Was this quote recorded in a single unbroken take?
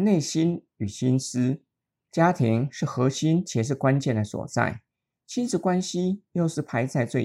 no; 1 cut; at 1.9 s

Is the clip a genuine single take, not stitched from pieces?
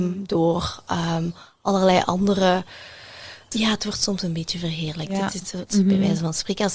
no; 2 cuts; at 3.5 s, 5.7 s

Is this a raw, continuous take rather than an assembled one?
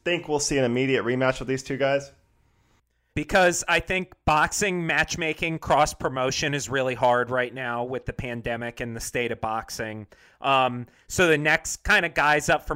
no; 1 cut; at 3.1 s

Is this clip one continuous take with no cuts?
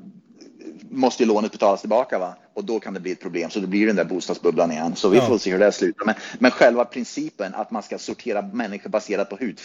yes; 0 cuts

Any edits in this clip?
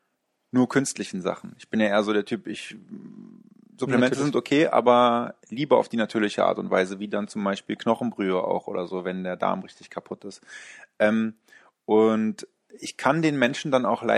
no; 0 cuts

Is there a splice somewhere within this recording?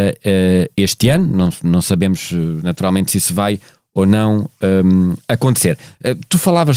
no; 0 cuts

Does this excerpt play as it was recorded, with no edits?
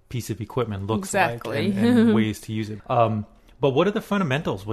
no; 1 cut; at 2.8 s

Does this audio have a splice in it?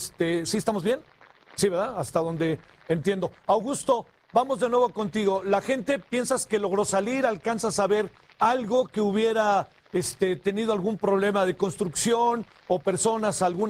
no; 0 cuts

